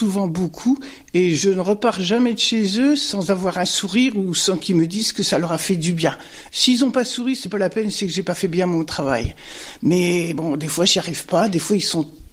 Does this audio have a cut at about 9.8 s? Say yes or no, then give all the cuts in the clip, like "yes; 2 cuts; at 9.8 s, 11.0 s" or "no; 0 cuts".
no; 1 cut; at 6.5 s